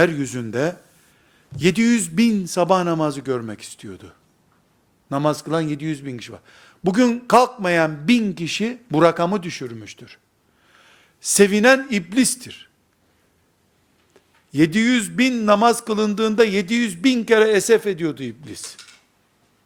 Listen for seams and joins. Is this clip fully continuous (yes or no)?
yes